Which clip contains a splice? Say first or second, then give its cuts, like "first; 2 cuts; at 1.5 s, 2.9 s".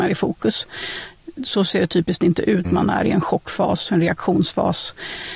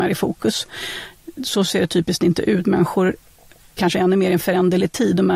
first; 1 cut; at 2.6 s